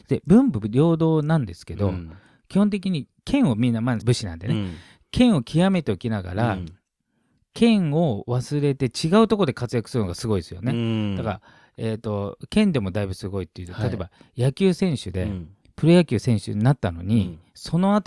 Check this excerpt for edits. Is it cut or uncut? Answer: cut